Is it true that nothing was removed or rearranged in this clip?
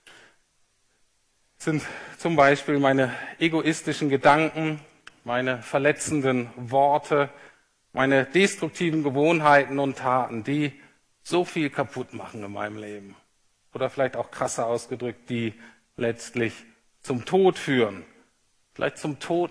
yes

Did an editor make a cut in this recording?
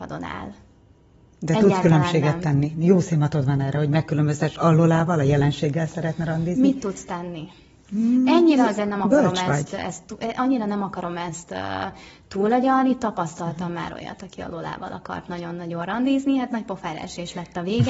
no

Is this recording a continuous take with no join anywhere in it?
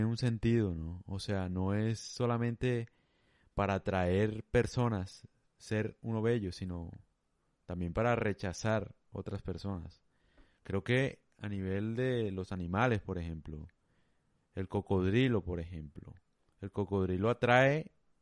yes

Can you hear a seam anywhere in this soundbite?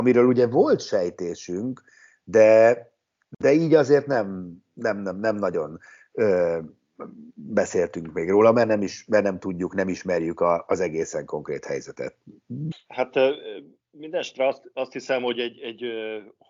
yes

